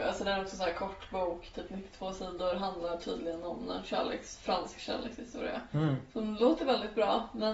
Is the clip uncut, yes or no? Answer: yes